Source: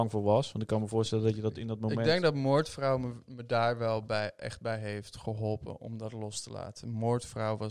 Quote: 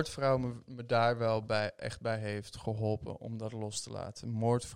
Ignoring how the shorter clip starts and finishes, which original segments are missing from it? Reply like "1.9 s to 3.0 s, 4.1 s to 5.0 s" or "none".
none